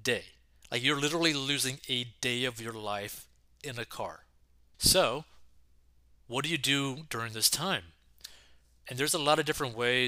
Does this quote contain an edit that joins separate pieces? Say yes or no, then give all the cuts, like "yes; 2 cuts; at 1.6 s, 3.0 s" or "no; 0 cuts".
yes; 1 cut; at 4.7 s